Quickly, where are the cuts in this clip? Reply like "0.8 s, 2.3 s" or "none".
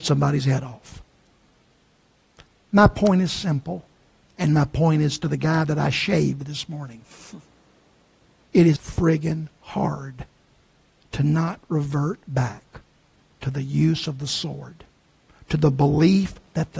8.8 s